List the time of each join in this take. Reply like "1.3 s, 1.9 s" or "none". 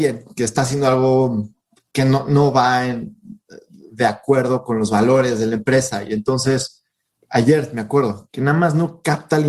8.3 s